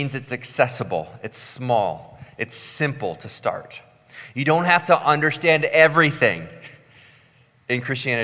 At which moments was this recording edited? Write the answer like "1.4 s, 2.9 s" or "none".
none